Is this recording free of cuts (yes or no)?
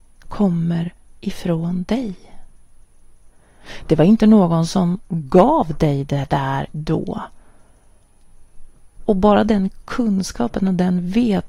no